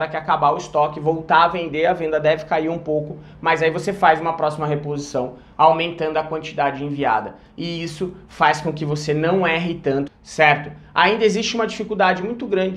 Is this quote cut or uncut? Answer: cut